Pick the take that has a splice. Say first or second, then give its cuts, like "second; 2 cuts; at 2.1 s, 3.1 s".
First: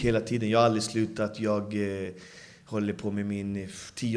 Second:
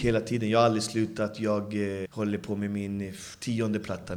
second; 1 cut; at 2.1 s